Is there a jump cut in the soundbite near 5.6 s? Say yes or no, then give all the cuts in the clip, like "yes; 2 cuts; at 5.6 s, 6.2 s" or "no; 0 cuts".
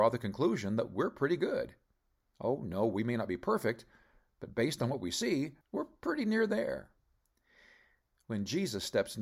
yes; 1 cut; at 5.6 s